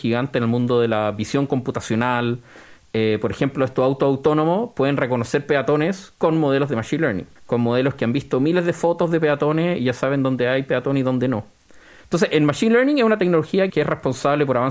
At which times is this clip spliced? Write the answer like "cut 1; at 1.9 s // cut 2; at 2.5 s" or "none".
cut 1; at 7.4 s // cut 2; at 12.0 s // cut 3; at 13.7 s